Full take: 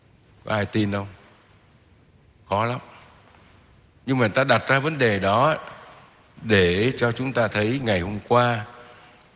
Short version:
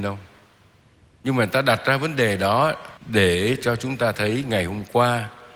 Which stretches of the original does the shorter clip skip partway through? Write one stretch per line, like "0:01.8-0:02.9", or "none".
0:01.9-0:03.9
0:05.8-0:06.3